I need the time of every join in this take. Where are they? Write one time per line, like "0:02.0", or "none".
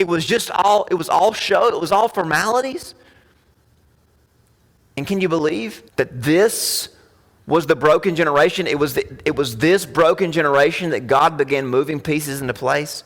0:05.9